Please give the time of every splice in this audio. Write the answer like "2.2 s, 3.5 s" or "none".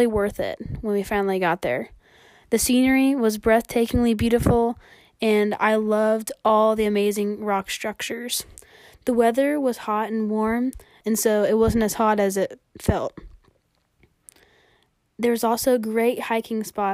11.0 s